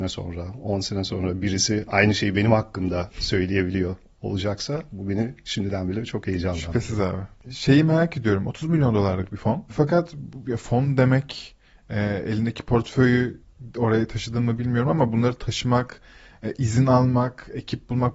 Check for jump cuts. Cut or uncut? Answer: uncut